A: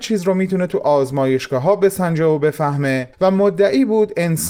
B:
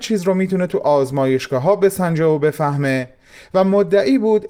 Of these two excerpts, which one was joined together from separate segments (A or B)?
A